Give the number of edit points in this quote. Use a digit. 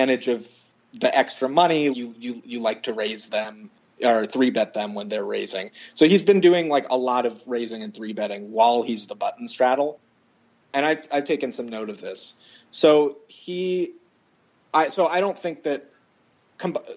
1